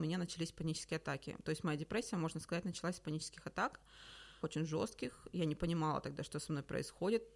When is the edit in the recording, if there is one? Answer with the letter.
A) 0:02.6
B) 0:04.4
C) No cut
B